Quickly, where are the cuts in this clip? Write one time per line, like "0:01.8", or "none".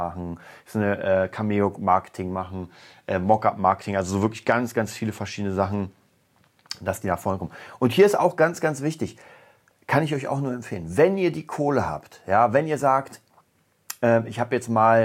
none